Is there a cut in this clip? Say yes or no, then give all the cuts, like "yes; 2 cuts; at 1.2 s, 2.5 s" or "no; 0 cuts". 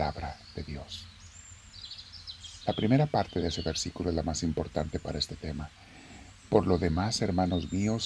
no; 0 cuts